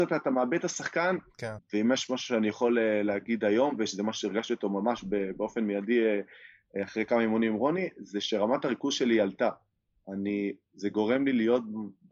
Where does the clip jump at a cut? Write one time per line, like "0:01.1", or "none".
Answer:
0:01.6